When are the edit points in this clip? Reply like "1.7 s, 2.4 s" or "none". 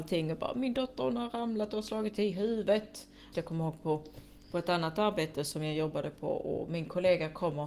3.3 s